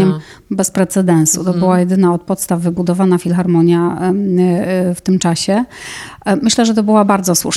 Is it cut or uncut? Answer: uncut